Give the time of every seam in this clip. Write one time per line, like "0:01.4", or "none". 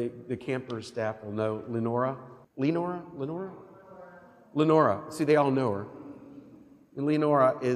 0:02.4